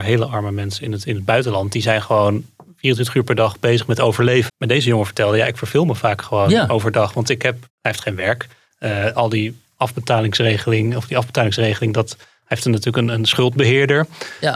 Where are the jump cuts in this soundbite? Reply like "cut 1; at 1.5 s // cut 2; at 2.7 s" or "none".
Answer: cut 1; at 4.5 s // cut 2; at 7.7 s

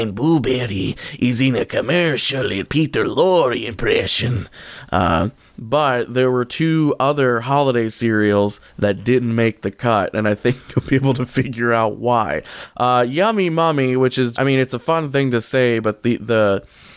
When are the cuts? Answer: cut 1; at 8.7 s // cut 2; at 14.3 s

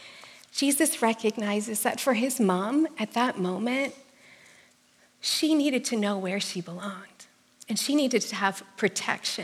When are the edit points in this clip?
none

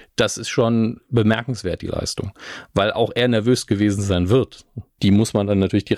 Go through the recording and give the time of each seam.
cut 1; at 5.0 s

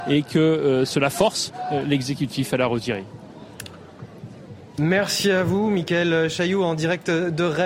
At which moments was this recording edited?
none

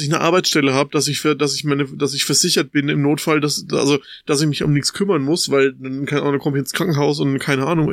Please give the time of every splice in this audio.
none

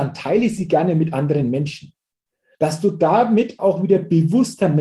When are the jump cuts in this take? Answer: cut 1; at 2.5 s // cut 2; at 3.6 s

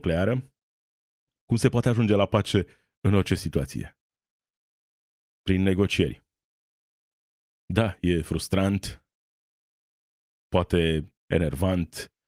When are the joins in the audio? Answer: cut 1; at 11.2 s

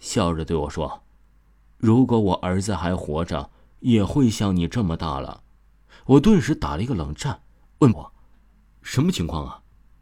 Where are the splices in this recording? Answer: cut 1; at 7.9 s

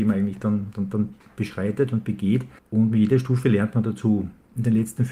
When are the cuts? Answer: none

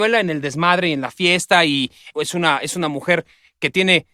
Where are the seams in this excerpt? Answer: cut 1; at 2.1 s

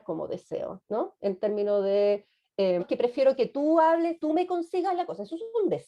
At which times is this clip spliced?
cut 1; at 2.8 s

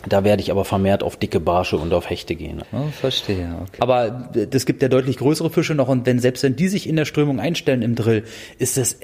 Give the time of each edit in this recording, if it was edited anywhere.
cut 1; at 2.6 s // cut 2; at 3.8 s

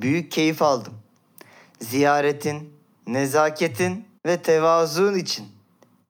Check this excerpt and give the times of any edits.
cut 1; at 4.2 s

